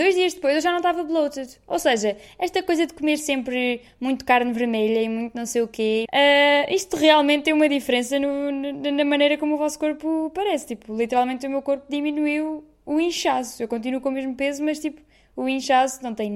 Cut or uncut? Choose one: cut